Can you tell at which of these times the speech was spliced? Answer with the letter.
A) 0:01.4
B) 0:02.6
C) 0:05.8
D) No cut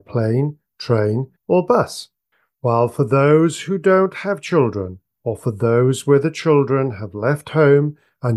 A